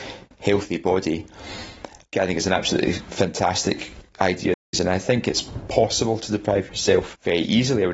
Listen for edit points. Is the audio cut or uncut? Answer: cut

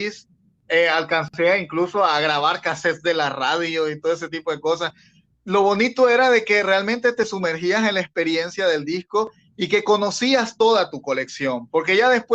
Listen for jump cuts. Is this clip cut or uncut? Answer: uncut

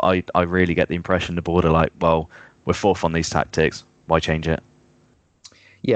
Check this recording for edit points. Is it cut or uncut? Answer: uncut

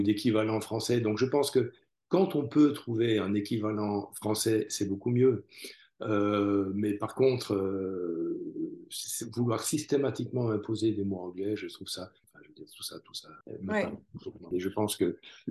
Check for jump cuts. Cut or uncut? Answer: cut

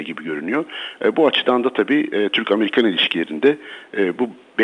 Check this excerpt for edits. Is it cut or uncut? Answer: uncut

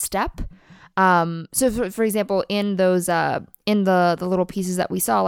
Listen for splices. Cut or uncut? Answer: uncut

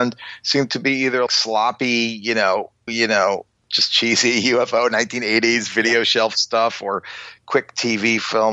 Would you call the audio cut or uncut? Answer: cut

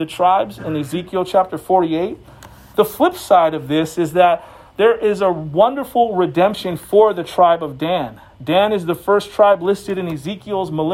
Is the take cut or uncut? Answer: cut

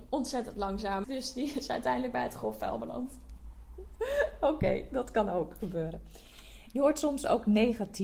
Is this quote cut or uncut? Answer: cut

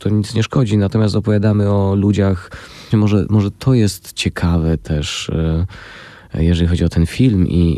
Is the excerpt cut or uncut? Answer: cut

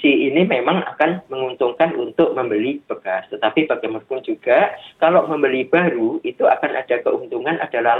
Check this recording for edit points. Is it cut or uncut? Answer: uncut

